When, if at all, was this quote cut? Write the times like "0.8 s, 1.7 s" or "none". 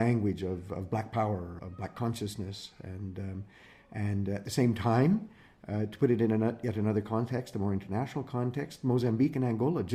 1.6 s